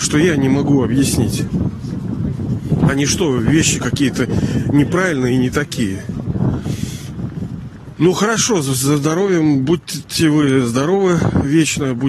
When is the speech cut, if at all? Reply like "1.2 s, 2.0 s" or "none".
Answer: none